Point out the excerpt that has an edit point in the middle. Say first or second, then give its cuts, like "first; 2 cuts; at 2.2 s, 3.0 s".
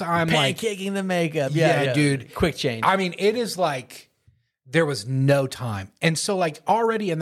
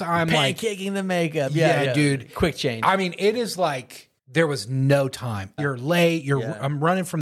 second; 2 cuts; at 4.2 s, 5.6 s